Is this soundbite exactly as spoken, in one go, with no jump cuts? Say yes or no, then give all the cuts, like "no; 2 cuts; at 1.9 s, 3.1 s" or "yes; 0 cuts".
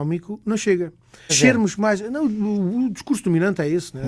no; 1 cut; at 1.3 s